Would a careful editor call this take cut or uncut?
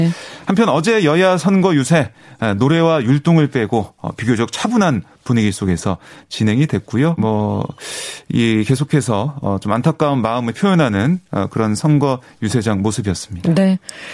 cut